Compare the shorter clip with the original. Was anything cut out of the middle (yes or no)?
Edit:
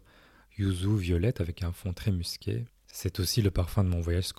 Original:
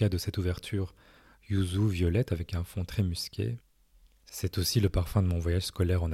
yes